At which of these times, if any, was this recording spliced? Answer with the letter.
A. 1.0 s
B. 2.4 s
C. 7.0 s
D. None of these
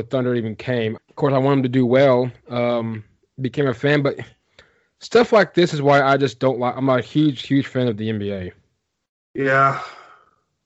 A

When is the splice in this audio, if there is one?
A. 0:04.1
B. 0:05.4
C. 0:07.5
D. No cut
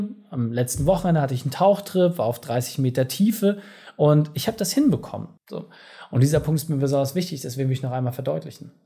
B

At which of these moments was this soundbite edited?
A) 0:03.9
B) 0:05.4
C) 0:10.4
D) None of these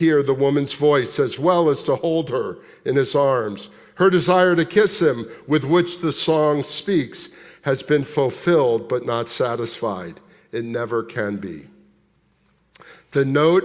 D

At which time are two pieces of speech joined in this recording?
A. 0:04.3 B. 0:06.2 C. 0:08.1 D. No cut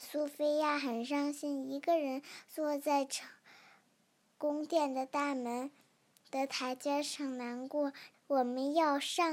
C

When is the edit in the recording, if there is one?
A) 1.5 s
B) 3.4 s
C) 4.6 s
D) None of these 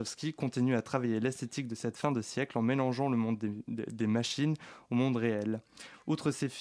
D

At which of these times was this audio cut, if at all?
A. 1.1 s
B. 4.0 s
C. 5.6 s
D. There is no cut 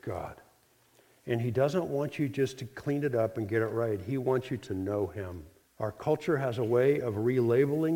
C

